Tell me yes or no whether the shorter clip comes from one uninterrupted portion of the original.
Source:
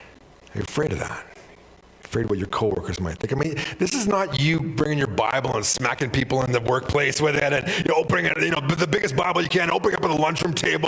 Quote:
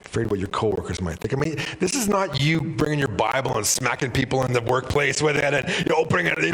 yes